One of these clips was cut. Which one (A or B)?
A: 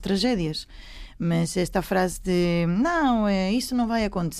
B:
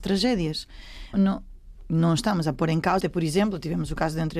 B